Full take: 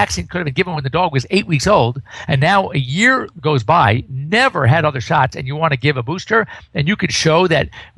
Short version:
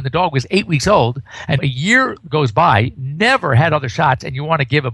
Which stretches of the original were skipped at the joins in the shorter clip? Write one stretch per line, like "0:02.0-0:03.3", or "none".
0:02.4-0:02.7